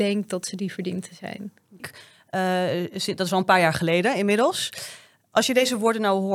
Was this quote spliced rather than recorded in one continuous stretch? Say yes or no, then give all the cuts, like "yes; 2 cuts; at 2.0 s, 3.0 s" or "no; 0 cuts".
yes; 1 cut; at 1.8 s